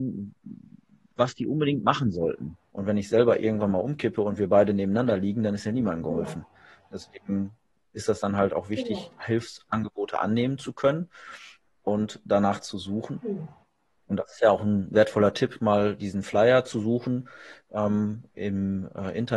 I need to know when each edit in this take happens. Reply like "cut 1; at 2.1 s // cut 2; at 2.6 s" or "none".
cut 1; at 2.7 s